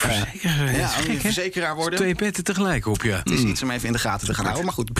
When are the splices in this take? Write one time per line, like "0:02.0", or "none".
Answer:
0:03.3